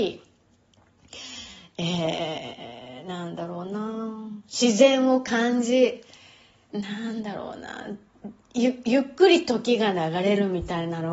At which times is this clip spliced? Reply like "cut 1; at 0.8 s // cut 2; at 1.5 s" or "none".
cut 1; at 6.7 s

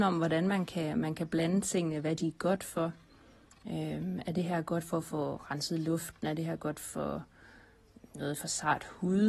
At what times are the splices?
none

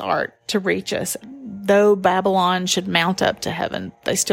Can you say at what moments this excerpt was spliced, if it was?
cut 1; at 1.2 s

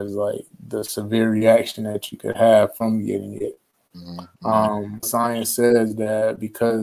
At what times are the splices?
cut 1; at 5.0 s

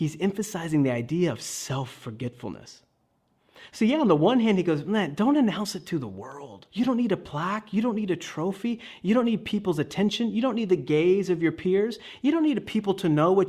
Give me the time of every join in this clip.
cut 1; at 6.7 s

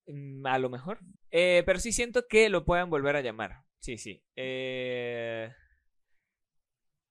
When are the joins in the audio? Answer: cut 1; at 1.1 s

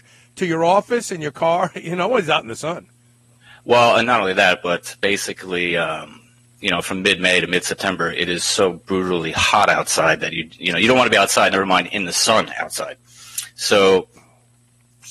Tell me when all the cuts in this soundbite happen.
none

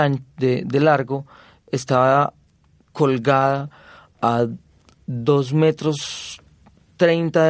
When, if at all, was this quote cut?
none

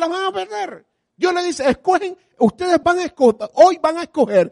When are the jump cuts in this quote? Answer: cut 1; at 2.8 s

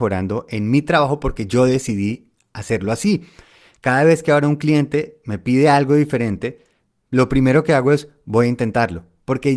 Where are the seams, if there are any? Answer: none

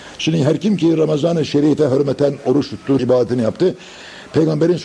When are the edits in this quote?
cut 1; at 3.0 s

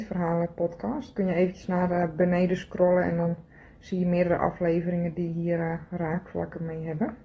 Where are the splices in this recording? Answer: none

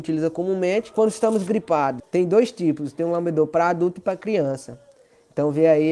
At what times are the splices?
cut 1; at 2.0 s

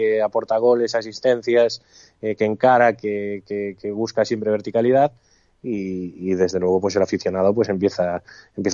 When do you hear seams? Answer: none

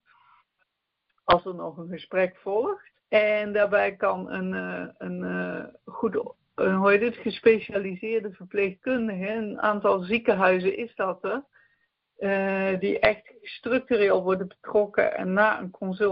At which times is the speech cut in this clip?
cut 1; at 3.0 s

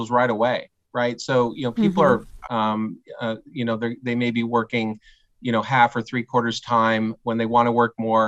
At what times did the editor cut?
cut 1; at 2.5 s // cut 2; at 7.2 s

